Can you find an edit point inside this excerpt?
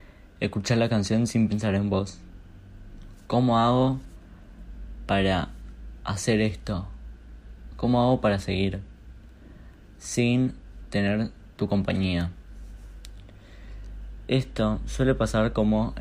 no; 0 cuts

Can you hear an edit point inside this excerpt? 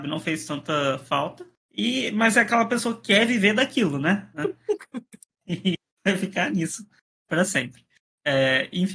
yes; 1 cut; at 4.3 s

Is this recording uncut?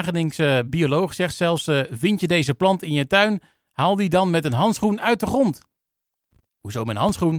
yes; 0 cuts

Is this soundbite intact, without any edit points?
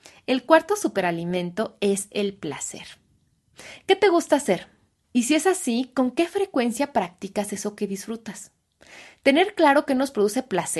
no; 1 cut; at 5.0 s

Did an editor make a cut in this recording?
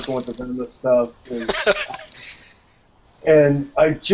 yes; 1 cut; at 1.3 s

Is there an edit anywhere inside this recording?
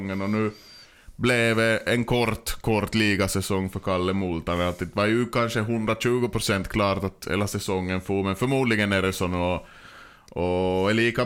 no; 0 cuts

